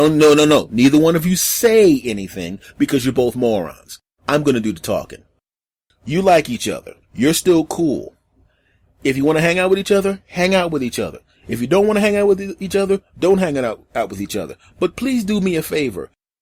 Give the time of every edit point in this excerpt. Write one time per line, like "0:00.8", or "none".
0:07.0